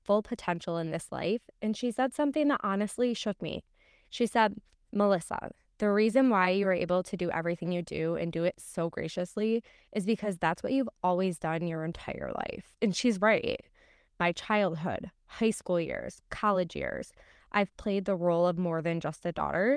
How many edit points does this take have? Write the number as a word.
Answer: three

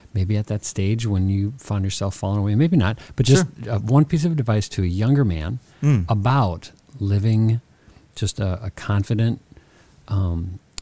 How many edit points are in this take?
zero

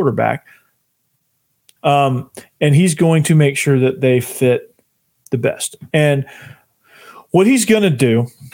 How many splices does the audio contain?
one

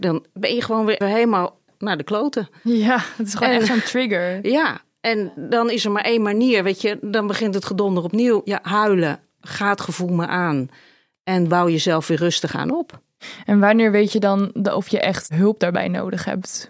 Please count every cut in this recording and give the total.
one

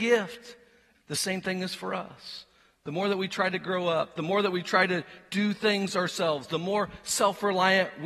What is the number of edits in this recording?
one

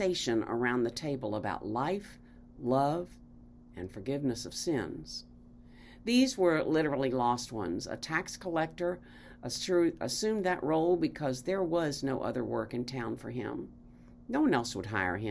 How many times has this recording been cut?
zero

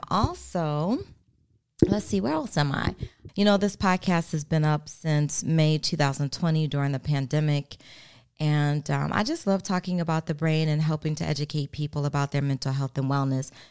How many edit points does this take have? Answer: one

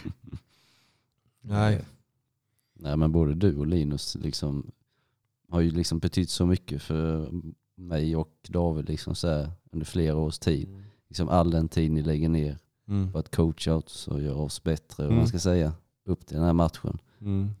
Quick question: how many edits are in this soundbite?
one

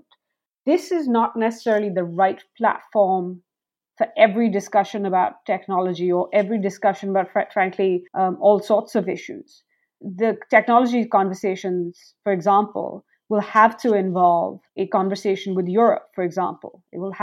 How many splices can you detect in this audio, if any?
two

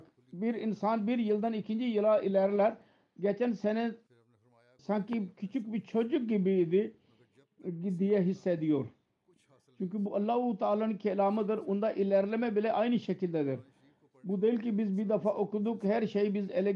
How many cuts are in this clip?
zero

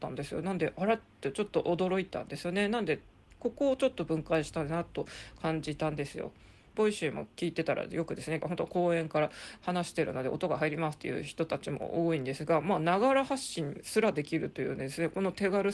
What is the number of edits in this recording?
two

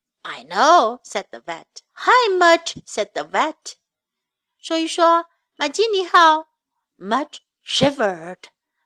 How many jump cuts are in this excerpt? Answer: one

